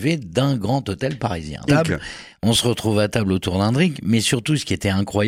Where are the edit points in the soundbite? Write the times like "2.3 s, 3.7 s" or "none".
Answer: 1.7 s